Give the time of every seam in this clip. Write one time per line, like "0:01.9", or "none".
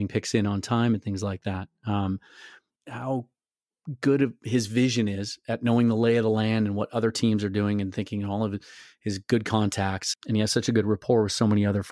0:02.8
0:10.1